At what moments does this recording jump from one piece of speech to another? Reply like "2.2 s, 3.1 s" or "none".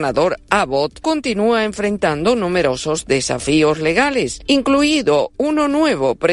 1.0 s